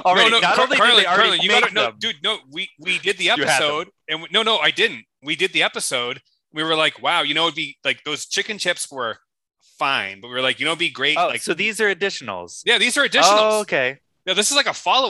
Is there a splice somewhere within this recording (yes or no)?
no